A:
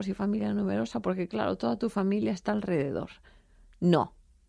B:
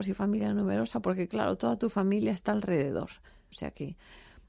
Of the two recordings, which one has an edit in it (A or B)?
B